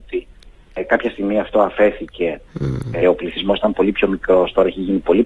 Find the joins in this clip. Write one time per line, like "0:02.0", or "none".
0:03.0